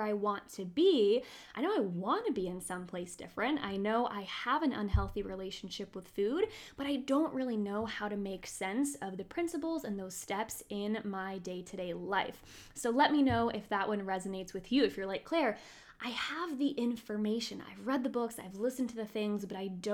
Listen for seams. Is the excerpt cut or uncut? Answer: uncut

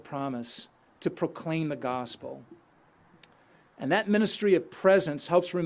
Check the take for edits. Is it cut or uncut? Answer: uncut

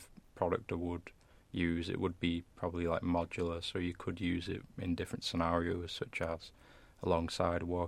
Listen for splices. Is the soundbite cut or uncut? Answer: uncut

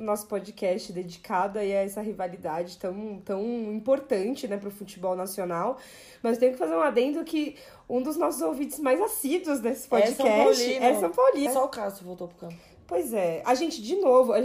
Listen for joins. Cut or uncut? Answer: cut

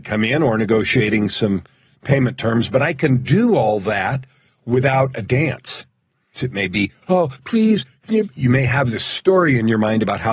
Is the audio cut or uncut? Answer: cut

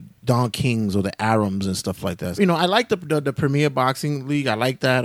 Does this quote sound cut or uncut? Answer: cut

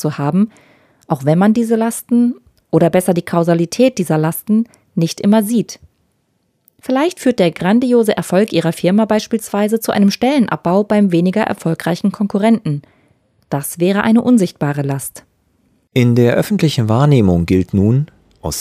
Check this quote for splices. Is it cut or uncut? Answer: uncut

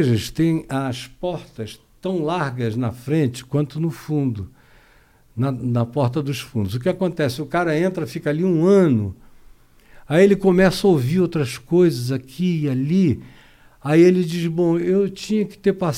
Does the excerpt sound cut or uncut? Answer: uncut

